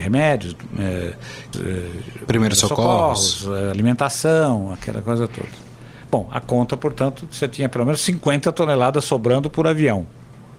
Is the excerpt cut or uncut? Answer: cut